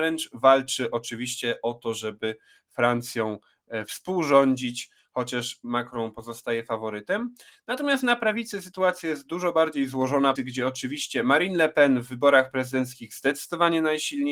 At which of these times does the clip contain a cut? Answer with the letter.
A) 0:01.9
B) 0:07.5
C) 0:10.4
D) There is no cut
C